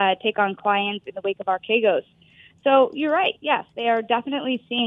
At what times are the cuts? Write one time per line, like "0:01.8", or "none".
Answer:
none

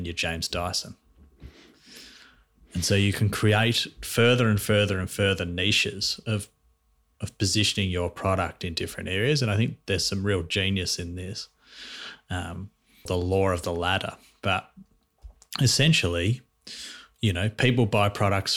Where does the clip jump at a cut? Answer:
0:13.1

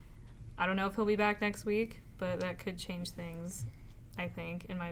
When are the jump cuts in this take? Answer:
none

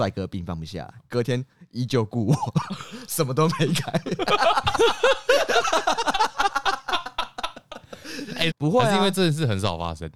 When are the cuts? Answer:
0:01.0
0:08.5

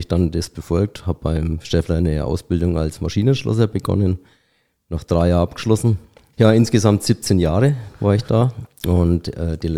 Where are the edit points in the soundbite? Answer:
0:06.3

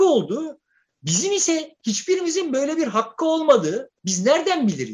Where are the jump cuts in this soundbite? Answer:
0:04.0

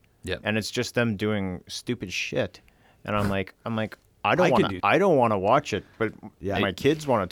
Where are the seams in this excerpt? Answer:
0:04.8

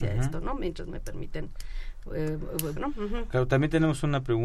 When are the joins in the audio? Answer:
0:02.8

